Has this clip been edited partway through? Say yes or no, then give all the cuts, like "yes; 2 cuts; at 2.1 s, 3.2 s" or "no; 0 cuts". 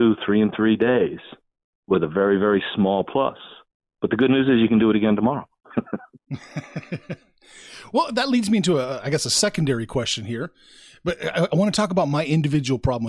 no; 0 cuts